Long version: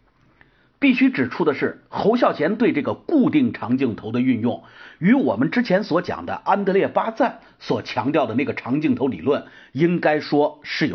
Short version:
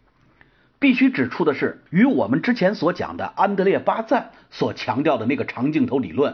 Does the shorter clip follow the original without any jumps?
no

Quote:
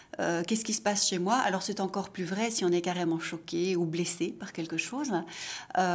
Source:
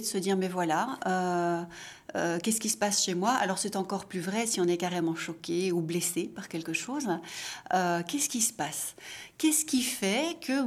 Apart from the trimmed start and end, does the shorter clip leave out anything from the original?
no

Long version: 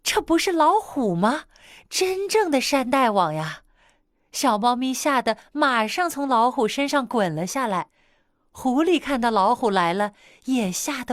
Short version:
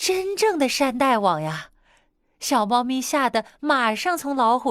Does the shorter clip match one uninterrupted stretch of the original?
yes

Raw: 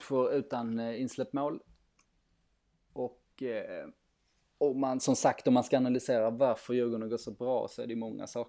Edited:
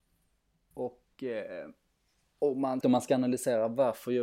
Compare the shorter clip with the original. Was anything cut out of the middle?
yes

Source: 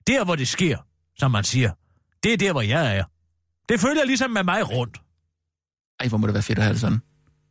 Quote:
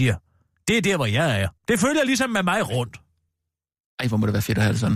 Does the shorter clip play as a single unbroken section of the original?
no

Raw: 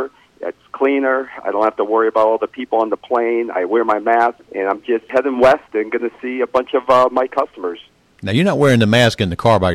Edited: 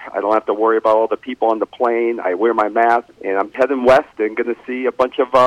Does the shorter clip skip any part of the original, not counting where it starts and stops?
yes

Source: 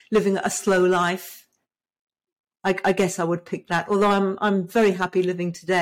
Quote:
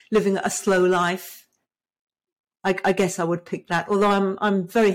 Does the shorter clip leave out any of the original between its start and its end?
no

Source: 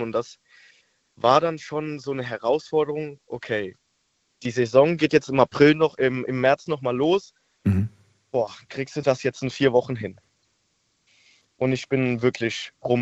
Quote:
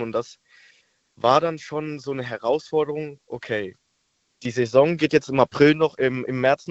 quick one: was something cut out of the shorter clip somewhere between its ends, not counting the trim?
no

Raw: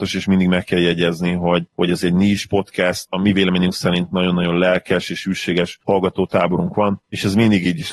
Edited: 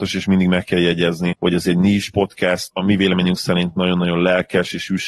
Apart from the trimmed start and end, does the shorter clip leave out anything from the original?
yes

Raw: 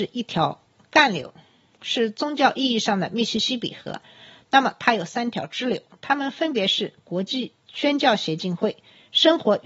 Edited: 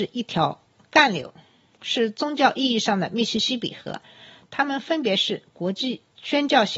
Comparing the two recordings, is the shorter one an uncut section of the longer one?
no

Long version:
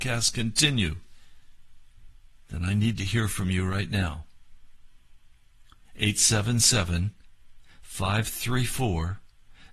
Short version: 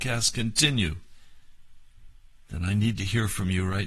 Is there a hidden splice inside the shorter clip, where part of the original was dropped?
no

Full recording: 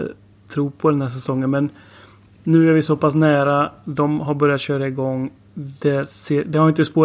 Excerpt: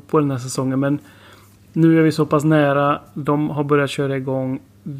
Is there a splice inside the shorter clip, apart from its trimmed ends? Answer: no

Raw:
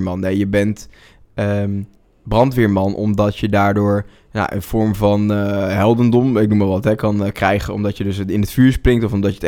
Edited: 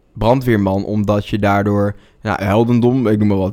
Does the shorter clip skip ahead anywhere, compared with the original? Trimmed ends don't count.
yes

